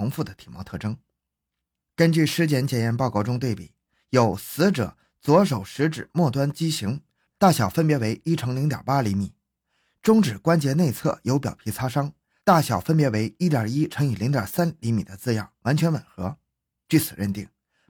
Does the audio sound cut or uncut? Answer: cut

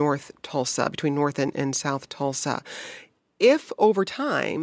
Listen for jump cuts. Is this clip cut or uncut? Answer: uncut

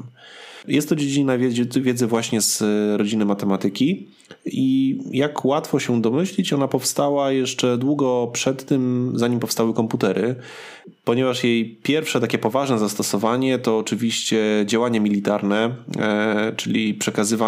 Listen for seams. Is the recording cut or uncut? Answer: uncut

